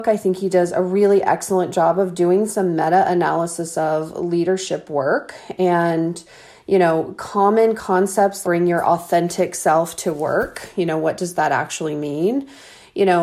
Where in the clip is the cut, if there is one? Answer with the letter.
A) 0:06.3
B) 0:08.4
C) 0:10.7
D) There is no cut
B